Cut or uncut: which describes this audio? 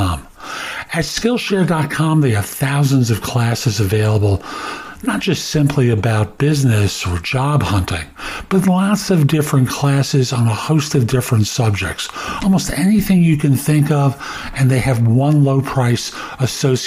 uncut